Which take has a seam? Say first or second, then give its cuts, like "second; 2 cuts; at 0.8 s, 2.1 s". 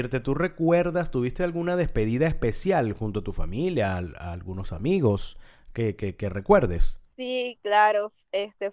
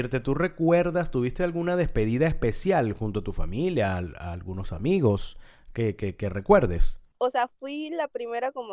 second; 1 cut; at 7.1 s